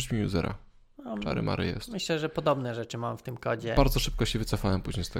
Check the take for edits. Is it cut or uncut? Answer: uncut